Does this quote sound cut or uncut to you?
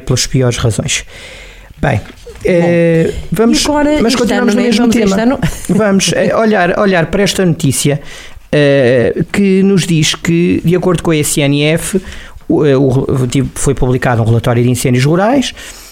uncut